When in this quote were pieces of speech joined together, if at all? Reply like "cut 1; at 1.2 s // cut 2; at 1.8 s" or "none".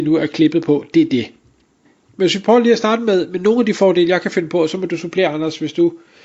cut 1; at 2.1 s